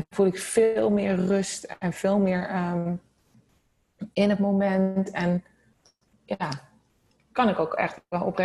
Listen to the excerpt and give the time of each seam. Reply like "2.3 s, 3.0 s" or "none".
none